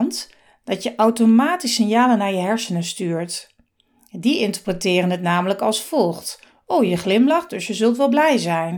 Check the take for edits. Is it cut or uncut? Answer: uncut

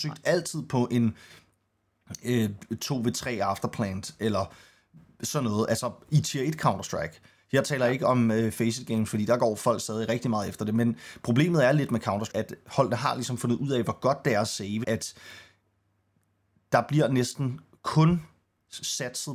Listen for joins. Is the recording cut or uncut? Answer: cut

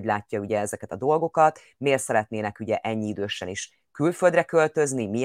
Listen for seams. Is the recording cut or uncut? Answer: uncut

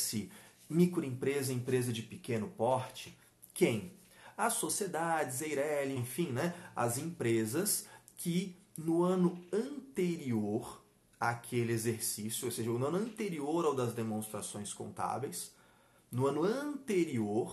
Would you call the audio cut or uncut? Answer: cut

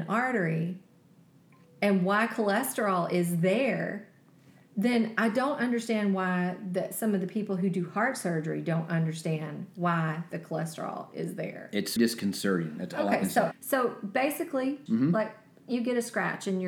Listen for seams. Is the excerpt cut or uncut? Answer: cut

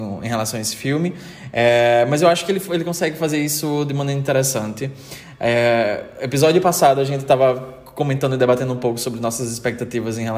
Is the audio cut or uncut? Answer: uncut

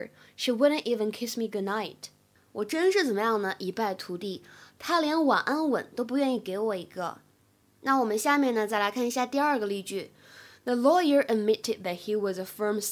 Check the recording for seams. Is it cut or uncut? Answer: uncut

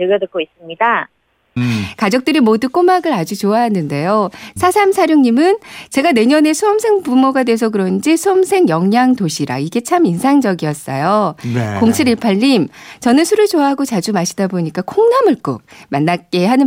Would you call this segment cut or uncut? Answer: cut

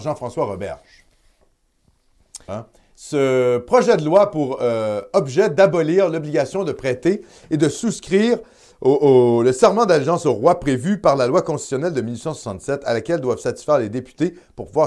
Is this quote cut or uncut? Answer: cut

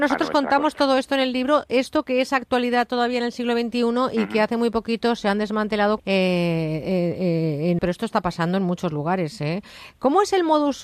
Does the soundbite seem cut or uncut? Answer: cut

